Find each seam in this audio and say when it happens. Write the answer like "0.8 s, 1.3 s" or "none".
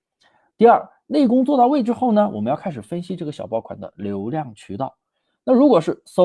none